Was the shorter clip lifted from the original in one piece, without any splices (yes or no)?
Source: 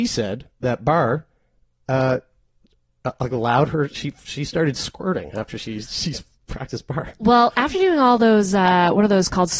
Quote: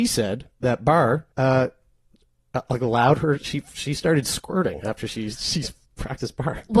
no